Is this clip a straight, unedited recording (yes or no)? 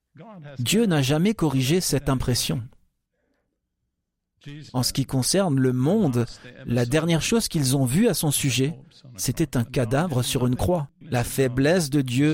no